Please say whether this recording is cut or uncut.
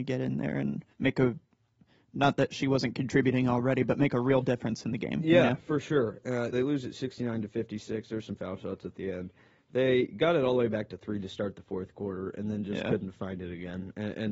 cut